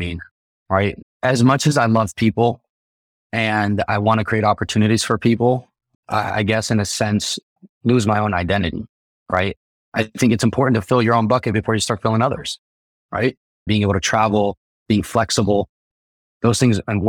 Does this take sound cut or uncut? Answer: cut